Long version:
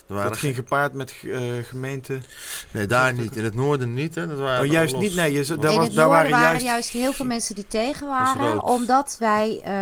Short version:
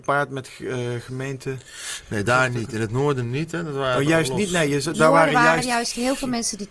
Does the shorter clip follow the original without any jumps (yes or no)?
no